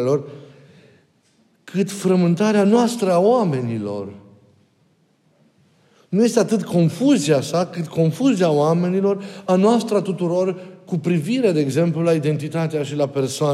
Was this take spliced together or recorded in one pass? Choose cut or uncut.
uncut